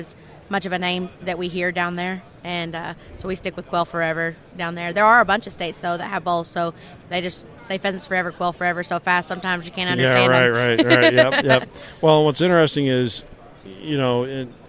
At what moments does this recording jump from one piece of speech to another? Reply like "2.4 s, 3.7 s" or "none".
7.0 s